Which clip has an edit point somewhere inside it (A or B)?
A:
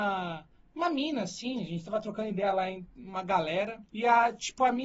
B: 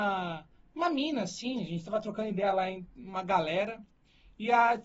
A